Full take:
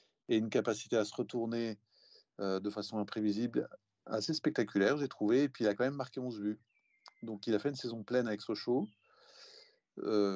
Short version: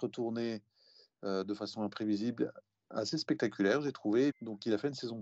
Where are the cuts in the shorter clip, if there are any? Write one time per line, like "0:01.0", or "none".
0:04.3

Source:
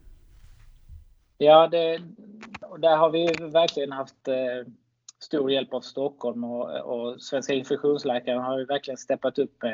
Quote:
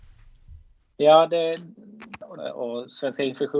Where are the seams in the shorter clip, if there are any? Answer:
0:02.4

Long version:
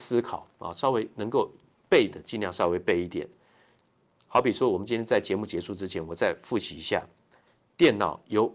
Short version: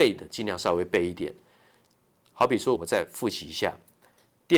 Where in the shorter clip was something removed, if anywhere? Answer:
0:02.8

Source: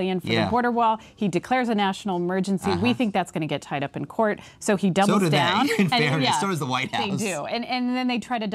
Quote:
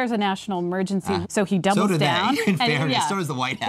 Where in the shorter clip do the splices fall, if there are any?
0:01.2

